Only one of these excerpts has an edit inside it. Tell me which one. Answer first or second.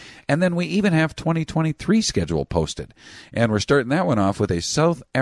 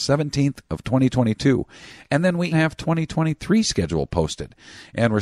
second